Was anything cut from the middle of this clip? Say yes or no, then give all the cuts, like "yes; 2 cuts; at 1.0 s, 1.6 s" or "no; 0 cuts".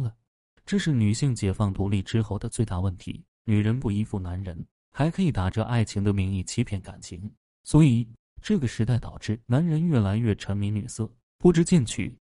yes; 3 cuts; at 4.8 s, 7.4 s, 9.4 s